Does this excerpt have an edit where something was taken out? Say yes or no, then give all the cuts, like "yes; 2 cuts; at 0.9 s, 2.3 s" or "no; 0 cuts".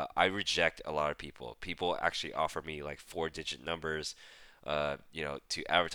no; 0 cuts